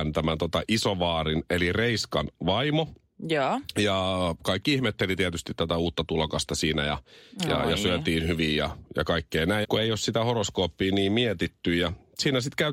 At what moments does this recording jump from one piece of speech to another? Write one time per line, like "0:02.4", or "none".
0:09.6